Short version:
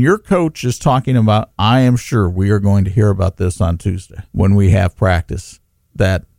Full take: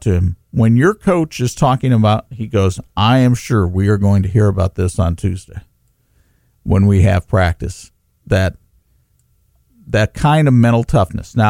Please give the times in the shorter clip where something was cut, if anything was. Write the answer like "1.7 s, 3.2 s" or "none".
1.5 s, 4.3 s